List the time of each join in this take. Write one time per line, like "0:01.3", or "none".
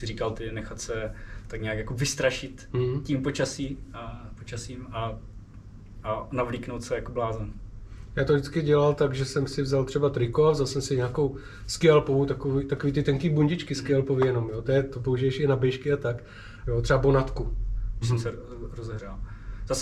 0:16.6
0:18.0